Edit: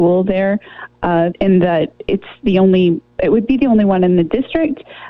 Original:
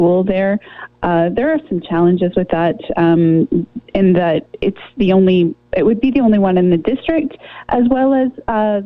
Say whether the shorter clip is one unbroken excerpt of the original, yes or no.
no